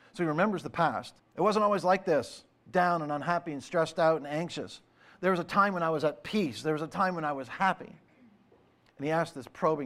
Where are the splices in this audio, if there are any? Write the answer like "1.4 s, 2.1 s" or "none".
1.2 s